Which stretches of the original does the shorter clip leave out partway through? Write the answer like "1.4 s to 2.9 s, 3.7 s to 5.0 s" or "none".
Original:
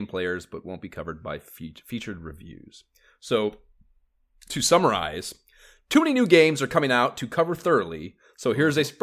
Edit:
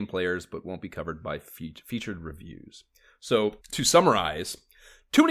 3.6 s to 4.4 s